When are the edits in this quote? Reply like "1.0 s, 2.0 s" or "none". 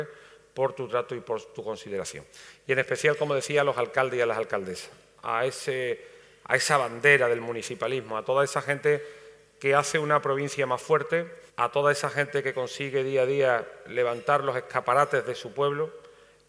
11.5 s